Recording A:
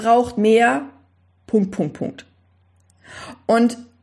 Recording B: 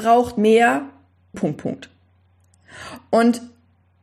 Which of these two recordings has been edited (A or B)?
B